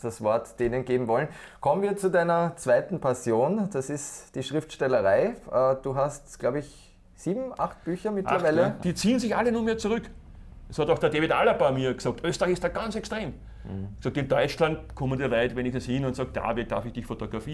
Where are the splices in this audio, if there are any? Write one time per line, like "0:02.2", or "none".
0:08.8